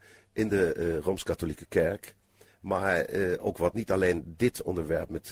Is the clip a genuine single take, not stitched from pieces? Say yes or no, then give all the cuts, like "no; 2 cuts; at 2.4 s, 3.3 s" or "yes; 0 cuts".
no; 1 cut; at 3.7 s